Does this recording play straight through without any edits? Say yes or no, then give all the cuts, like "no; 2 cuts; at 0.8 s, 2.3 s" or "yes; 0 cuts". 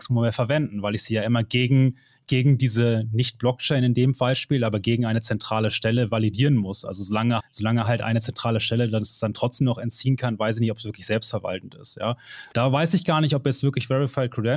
no; 2 cuts; at 7.4 s, 12.5 s